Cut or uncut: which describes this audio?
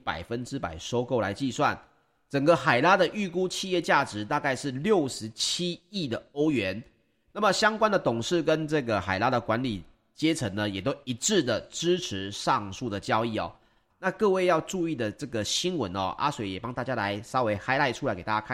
cut